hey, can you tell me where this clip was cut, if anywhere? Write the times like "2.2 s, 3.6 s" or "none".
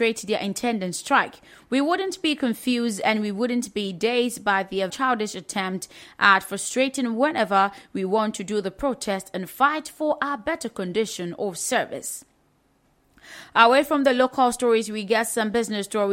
4.9 s